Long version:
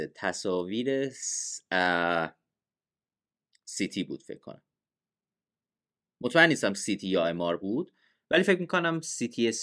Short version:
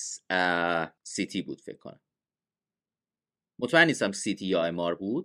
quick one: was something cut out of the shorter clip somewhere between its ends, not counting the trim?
yes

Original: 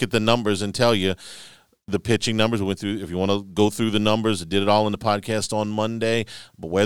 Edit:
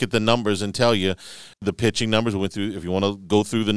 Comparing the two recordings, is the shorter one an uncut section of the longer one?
no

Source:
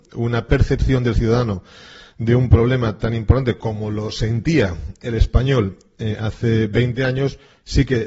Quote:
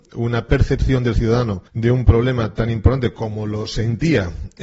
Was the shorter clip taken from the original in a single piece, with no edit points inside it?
no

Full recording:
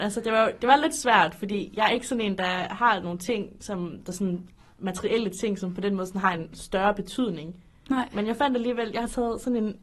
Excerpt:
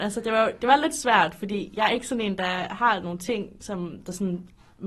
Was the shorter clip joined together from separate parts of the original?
no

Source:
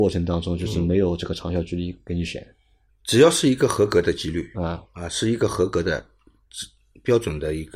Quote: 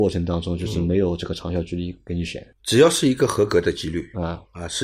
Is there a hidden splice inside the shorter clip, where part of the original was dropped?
yes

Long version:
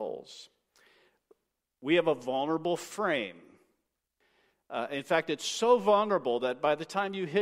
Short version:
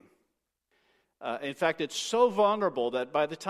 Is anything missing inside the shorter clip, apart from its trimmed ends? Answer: no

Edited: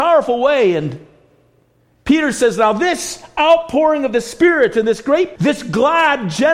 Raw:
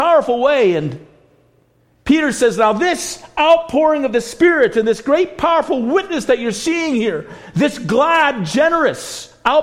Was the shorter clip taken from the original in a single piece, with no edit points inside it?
no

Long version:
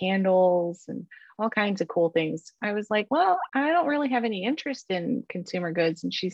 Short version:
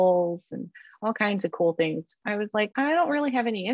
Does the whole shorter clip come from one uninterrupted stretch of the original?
no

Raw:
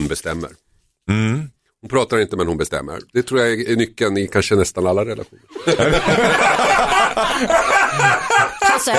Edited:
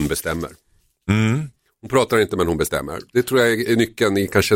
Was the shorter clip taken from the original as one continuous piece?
yes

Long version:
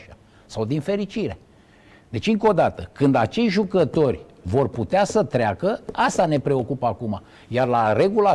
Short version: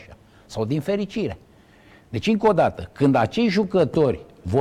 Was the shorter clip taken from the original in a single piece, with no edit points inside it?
yes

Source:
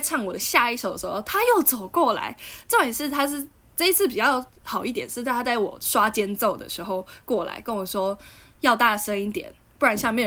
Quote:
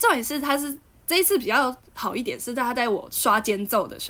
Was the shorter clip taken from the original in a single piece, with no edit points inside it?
yes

